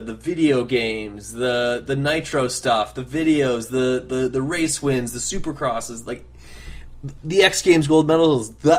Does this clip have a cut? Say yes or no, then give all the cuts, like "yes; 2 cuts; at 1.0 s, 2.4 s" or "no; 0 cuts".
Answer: yes; 1 cut; at 7.2 s